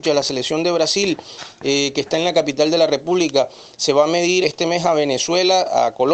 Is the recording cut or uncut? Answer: cut